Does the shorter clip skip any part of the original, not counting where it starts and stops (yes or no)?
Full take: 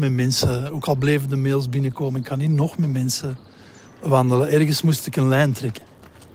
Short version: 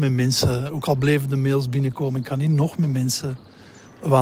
no